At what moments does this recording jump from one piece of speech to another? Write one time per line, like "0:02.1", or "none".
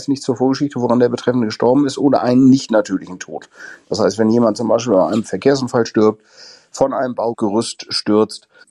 none